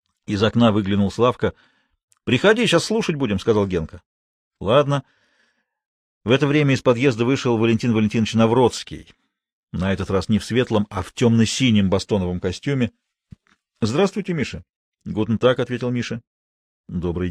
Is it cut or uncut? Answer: uncut